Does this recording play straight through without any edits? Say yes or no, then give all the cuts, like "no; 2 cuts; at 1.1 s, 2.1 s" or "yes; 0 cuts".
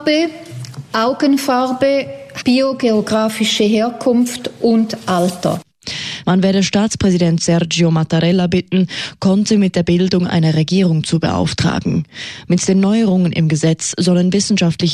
no; 3 cuts; at 2.4 s, 6.2 s, 12.5 s